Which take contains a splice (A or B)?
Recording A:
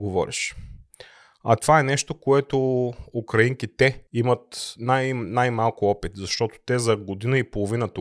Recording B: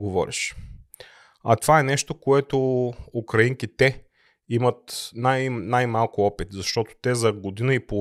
A